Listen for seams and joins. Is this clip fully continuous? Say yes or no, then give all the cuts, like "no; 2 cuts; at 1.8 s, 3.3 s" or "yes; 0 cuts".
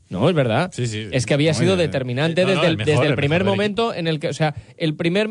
yes; 0 cuts